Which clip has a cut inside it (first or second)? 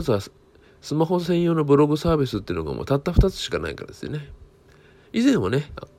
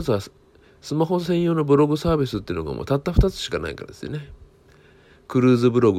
first